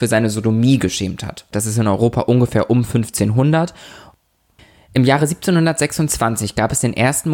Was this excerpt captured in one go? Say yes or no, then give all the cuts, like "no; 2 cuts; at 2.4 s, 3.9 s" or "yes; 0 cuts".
no; 1 cut; at 1.5 s